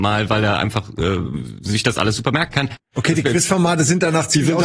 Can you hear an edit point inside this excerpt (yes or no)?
yes